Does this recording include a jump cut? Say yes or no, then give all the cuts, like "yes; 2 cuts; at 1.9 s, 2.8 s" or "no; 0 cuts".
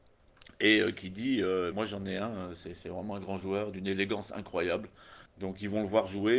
yes; 2 cuts; at 1.7 s, 5.3 s